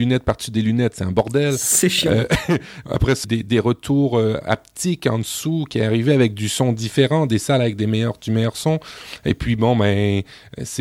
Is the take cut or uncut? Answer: cut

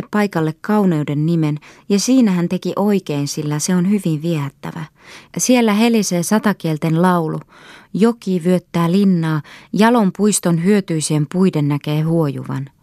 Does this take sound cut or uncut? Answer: uncut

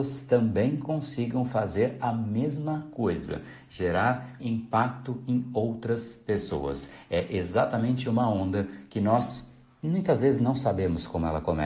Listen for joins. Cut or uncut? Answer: cut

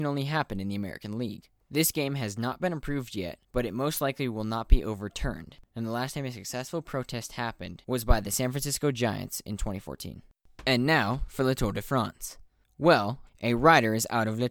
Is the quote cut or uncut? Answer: cut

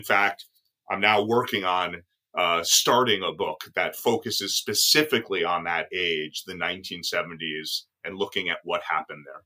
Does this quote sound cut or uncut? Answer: uncut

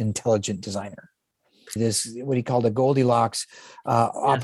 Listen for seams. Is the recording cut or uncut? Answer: cut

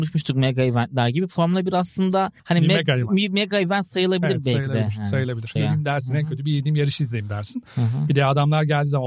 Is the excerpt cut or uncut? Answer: cut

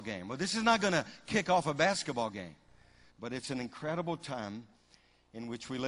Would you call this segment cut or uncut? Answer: cut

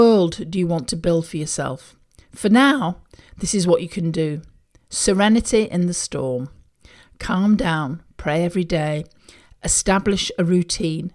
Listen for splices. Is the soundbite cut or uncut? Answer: uncut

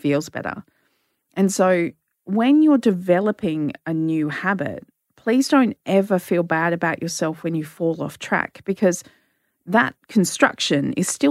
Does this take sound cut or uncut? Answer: uncut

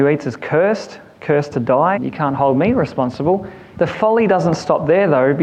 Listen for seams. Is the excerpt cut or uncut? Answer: cut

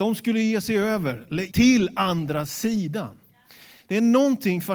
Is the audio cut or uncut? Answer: cut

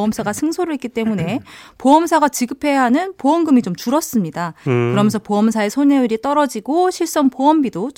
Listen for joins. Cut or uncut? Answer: uncut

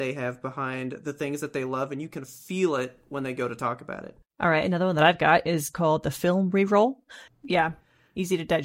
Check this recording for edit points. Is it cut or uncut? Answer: cut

